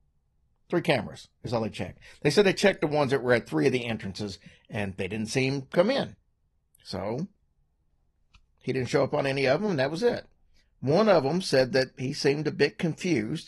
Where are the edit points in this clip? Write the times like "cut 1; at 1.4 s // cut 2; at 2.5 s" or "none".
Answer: cut 1; at 10.6 s